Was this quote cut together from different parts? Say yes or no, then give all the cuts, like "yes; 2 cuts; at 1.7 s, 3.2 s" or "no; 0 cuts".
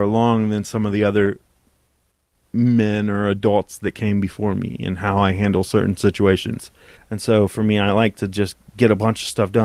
yes; 1 cut; at 7.0 s